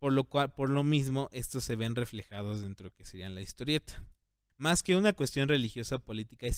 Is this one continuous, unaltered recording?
no; 1 cut; at 4.5 s

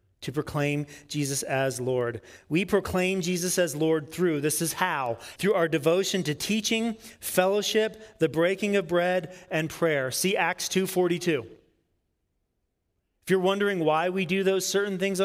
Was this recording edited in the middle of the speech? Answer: yes; 1 cut; at 5.4 s

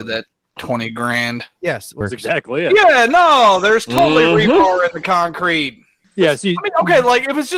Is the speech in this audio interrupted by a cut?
yes; 2 cuts; at 2.0 s, 6.0 s

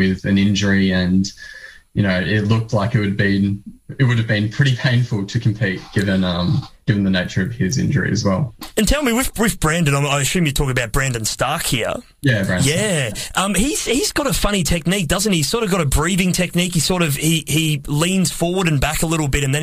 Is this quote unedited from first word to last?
yes; 0 cuts

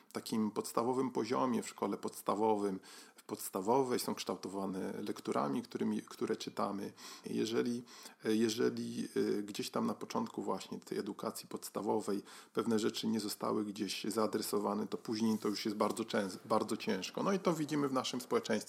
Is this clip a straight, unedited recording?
no; 1 cut; at 7.2 s

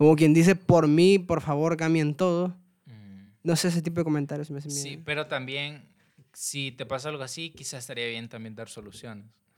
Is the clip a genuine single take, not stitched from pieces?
yes; 0 cuts

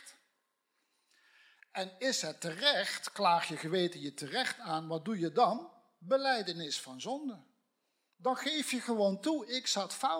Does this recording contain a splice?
no; 0 cuts

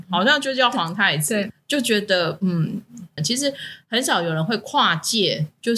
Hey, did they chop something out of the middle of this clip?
yes; 1 cut; at 3.2 s

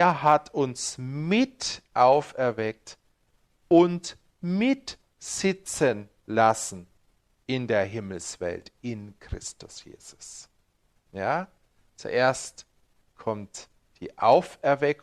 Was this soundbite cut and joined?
no; 0 cuts

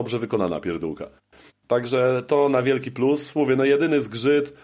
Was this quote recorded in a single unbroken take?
yes; 0 cuts

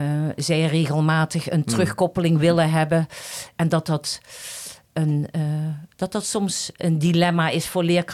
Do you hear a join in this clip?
no; 0 cuts

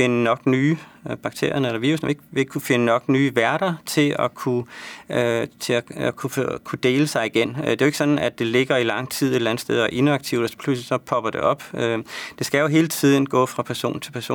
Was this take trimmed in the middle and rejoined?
no; 0 cuts

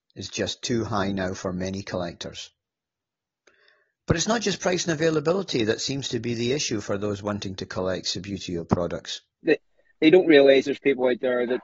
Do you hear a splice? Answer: yes; 1 cut; at 9.4 s

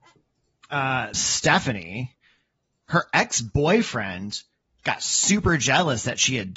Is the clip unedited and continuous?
no; 1 cut; at 1.1 s

